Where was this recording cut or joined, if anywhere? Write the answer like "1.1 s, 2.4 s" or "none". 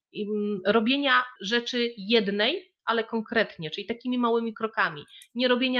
1.4 s